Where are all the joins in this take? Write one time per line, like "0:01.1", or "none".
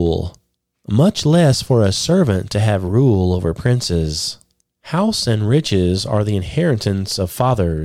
0:04.7